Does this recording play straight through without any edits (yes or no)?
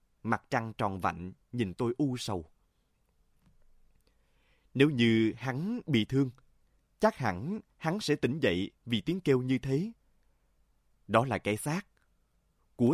yes